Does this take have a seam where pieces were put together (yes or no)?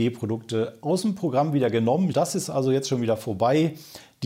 yes